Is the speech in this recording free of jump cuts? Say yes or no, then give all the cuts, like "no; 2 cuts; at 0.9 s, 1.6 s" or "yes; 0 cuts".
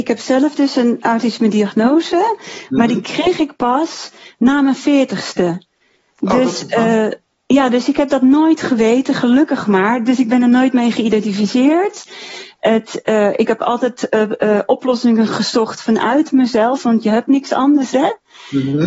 yes; 0 cuts